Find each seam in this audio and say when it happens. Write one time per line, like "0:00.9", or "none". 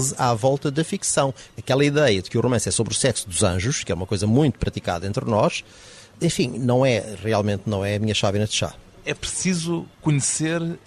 0:01.5